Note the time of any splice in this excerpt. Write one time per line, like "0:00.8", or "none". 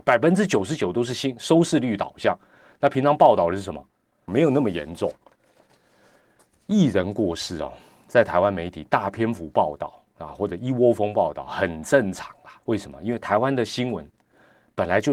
0:04.3
0:12.6